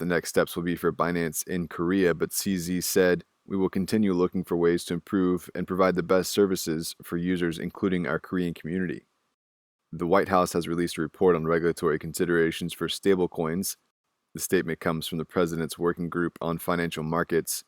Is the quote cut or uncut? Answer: uncut